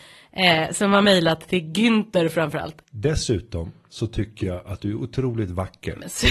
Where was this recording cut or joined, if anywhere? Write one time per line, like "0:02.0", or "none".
0:02.8